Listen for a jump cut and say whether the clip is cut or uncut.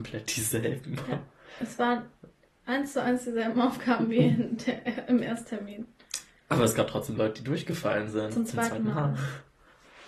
uncut